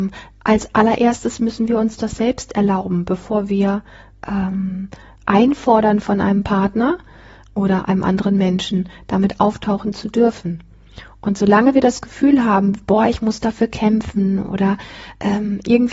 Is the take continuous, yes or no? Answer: yes